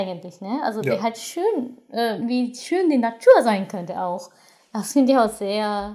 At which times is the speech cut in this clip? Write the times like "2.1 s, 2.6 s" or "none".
2.2 s